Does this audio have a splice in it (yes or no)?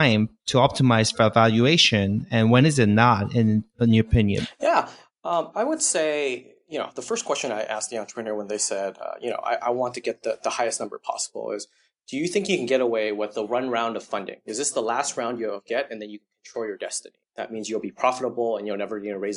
yes